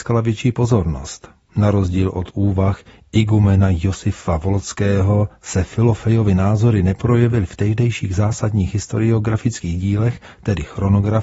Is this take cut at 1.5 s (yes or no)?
no